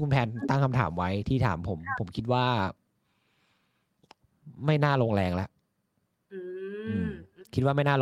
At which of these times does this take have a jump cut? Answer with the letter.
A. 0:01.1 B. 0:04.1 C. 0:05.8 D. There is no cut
D